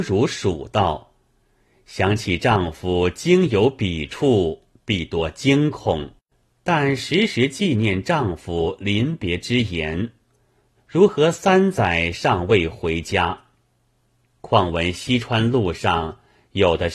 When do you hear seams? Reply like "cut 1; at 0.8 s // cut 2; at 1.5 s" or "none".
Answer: cut 1; at 6.5 s // cut 2; at 10.8 s